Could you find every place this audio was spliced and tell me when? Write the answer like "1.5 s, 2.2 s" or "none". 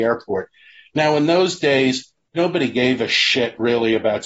none